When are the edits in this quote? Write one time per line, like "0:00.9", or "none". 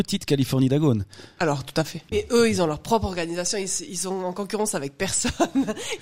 none